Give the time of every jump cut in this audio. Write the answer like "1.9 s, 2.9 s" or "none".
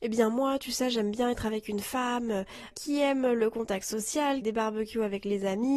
2.7 s, 4.4 s